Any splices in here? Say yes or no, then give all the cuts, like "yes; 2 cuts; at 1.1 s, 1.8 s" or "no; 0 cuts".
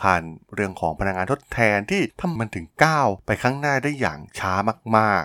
yes; 1 cut; at 2.4 s